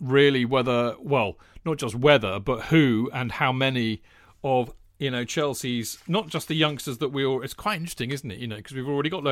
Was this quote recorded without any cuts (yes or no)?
yes